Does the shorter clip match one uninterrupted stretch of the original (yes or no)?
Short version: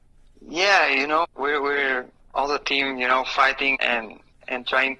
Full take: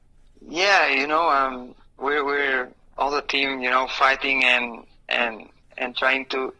no